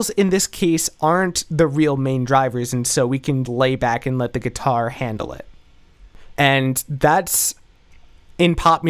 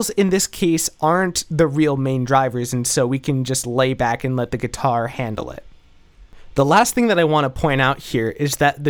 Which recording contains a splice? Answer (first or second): first